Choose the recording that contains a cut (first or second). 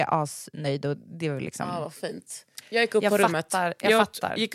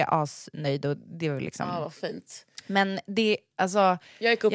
first